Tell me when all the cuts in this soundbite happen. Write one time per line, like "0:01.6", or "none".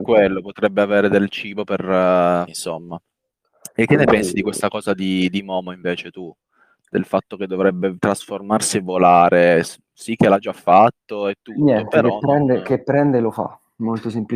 0:02.5